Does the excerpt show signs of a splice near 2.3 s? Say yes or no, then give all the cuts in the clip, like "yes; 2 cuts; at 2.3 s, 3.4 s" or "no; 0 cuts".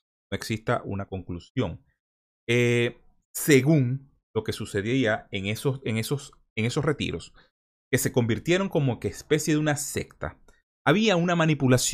yes; 1 cut; at 2.3 s